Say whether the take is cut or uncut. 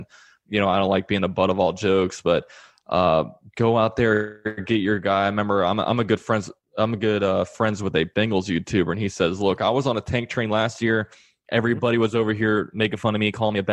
uncut